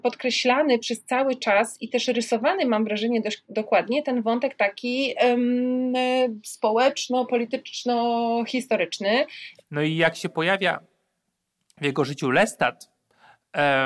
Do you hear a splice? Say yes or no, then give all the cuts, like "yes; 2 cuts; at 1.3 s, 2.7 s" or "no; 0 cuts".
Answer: yes; 1 cut; at 9.6 s